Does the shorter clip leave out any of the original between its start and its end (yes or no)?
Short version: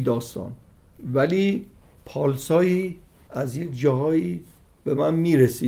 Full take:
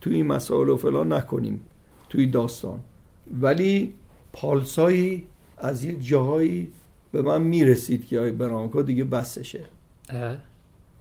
no